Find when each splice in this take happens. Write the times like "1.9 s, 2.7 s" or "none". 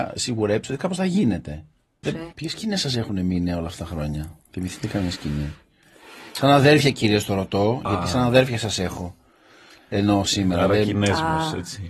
2.0 s